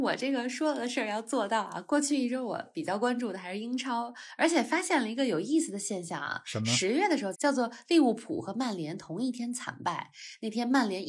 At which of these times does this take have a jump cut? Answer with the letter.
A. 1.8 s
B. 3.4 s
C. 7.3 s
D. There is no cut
C